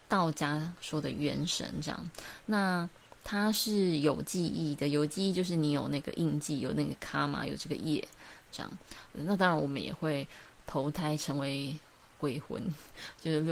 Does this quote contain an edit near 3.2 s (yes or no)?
no